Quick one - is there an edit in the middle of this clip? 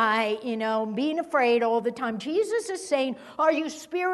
no; 0 cuts

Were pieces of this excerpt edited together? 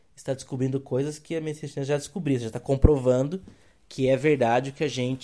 no; 0 cuts

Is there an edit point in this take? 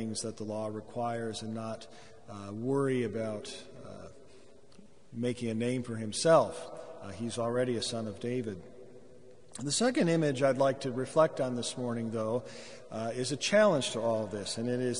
no; 0 cuts

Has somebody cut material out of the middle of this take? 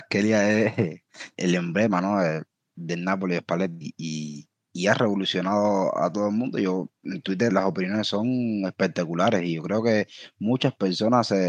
yes; 2 cuts; at 1.3 s, 7.5 s

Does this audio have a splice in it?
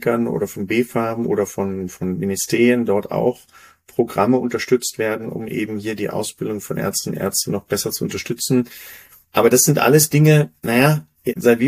yes; 1 cut; at 9.3 s

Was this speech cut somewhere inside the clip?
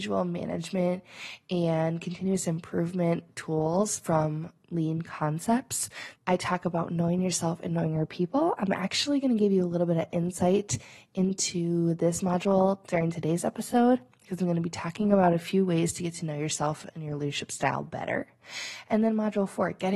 yes; 1 cut; at 6.1 s

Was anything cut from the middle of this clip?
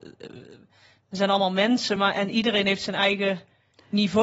no; 0 cuts

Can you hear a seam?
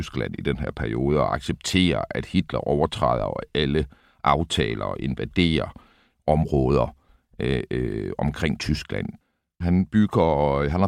yes; 1 cut; at 9.6 s

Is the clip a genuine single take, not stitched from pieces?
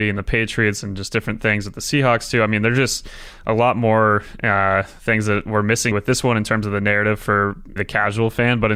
no; 2 cuts; at 5.9 s, 7.8 s

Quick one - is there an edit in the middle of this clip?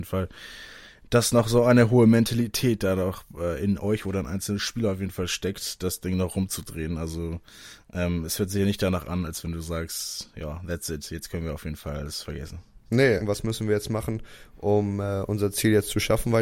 yes; 1 cut; at 13.2 s

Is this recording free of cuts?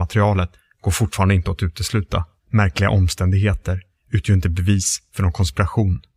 no; 1 cut; at 2.4 s

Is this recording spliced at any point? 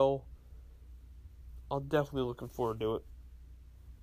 no; 0 cuts

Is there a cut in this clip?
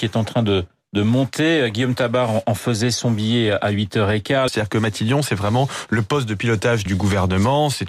yes; 2 cuts; at 4.5 s, 6.9 s

